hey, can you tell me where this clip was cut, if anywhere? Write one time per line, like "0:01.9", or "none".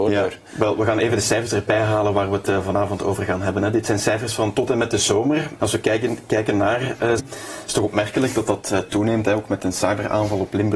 0:05.6
0:07.2

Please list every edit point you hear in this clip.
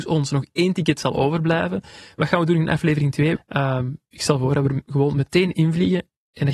0:03.3

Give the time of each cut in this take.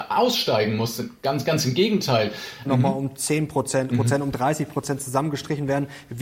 0:02.6
0:03.9

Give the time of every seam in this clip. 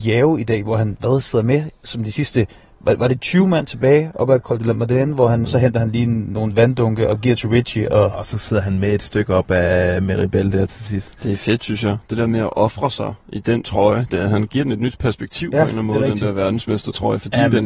0:05.4
0:14.1

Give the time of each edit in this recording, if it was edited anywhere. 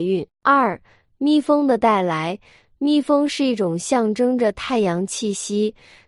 none

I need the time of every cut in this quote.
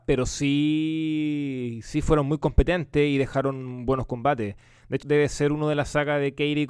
0:05.0

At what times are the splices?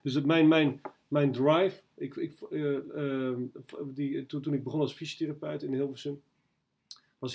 none

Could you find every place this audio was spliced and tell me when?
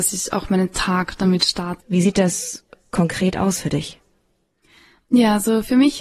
0:01.8

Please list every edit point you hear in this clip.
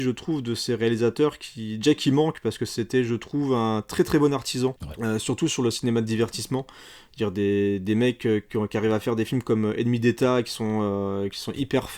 none

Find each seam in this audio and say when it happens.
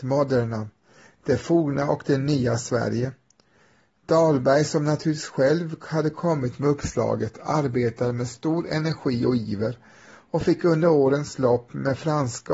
none

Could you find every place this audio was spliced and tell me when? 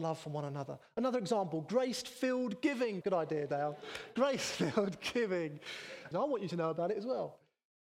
0:03.0
0:06.1

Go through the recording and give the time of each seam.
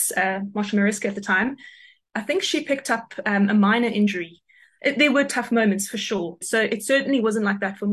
0:04.8
0:06.4

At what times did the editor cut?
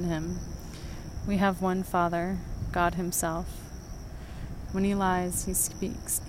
0:01.2
0:04.7

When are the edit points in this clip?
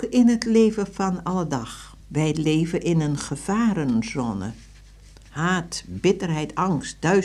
0:02.0

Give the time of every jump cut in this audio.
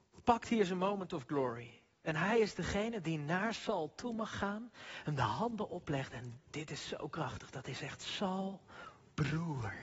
none

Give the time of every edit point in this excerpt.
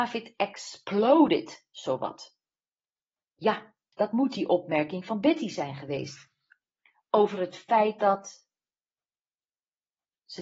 0:03.9

